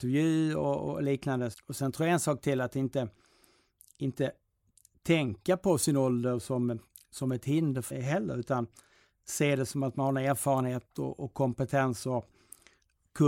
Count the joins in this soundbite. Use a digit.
2